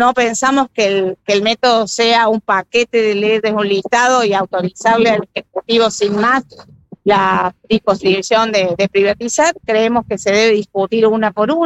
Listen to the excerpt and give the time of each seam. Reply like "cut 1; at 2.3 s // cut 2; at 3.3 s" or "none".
none